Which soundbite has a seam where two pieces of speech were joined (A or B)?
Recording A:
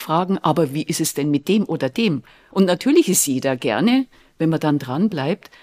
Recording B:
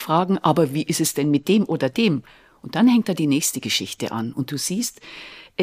A